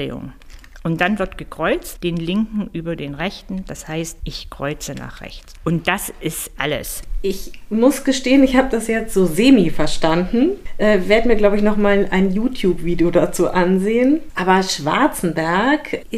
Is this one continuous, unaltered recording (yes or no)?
no